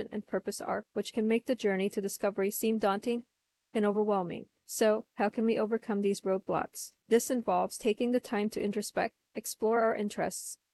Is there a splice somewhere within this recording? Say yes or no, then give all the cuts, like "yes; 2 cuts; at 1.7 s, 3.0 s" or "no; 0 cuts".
yes; 1 cut; at 7.0 s